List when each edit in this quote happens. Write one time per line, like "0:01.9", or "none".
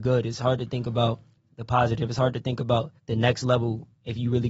0:03.0